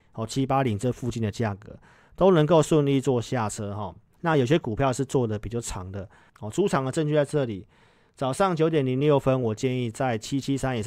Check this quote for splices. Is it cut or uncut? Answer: cut